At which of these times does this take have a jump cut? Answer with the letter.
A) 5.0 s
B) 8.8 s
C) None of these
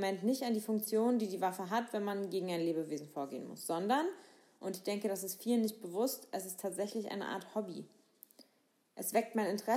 C